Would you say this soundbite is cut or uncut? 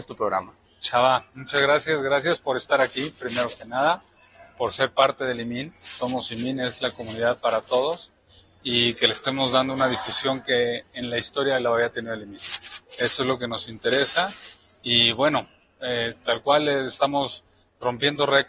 uncut